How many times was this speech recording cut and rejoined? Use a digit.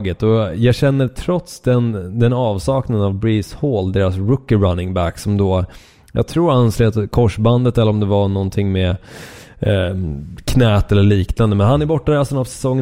0